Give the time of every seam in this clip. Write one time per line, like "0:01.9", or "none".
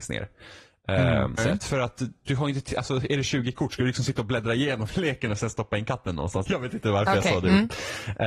0:01.4
0:06.5